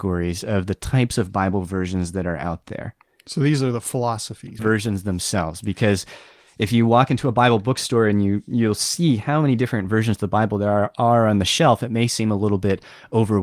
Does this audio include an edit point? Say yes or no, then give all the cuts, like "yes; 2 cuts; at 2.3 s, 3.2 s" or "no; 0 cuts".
yes; 1 cut; at 4.6 s